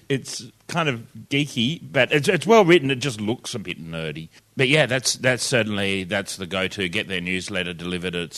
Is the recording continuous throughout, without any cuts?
yes; 0 cuts

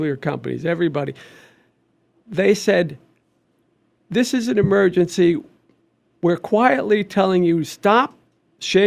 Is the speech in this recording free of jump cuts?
yes; 0 cuts

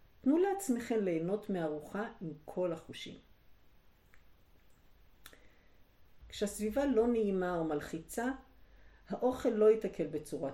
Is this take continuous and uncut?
no; 1 cut; at 6.2 s

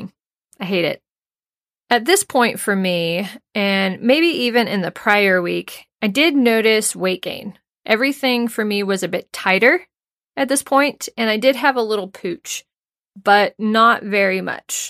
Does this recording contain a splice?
no; 0 cuts

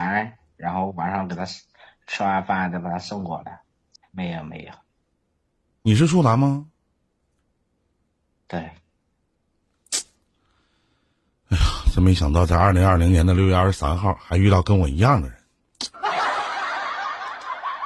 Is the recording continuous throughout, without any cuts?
no; 1 cut; at 4.0 s

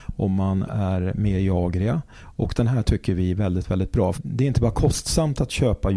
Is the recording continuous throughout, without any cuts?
no; 1 cut; at 4.1 s

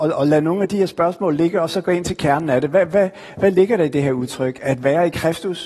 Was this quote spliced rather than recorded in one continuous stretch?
no; 0 cuts

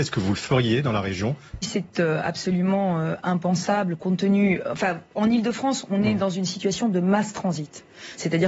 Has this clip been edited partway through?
yes; 1 cut; at 1.6 s

